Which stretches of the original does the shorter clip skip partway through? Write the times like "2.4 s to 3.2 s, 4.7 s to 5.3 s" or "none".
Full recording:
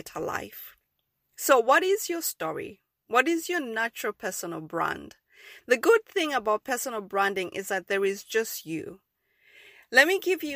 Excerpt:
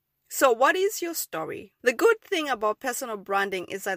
2.9 s to 5.6 s